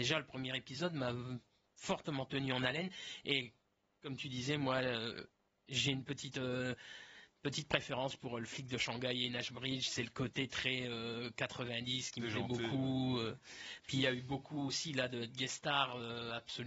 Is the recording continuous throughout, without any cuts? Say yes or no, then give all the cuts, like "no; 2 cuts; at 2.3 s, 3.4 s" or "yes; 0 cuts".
yes; 0 cuts